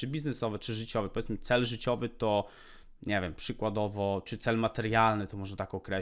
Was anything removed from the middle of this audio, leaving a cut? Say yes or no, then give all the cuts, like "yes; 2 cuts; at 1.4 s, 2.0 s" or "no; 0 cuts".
no; 0 cuts